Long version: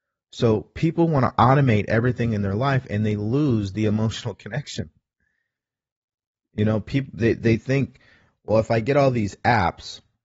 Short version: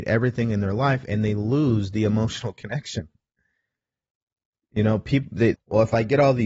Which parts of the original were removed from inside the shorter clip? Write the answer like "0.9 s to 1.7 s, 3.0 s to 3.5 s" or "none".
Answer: 7.4 s to 8.3 s